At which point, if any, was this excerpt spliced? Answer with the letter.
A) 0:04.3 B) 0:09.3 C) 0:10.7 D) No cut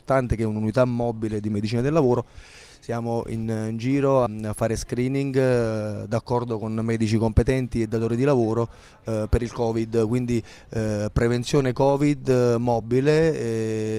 A